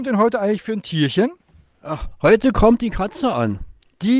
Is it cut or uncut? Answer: uncut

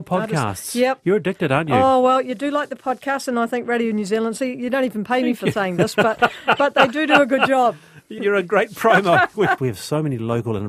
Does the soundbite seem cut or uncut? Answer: cut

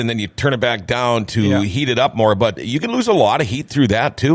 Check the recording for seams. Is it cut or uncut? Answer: cut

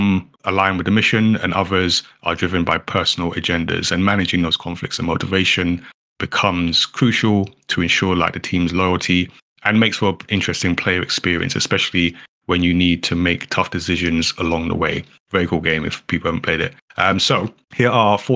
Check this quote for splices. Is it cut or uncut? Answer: uncut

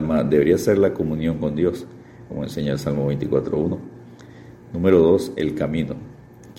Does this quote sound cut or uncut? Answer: cut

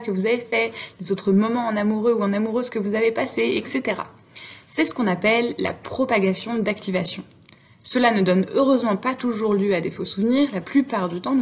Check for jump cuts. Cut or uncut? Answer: uncut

